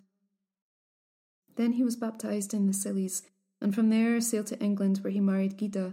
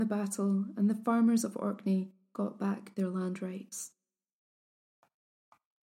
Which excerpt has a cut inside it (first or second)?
first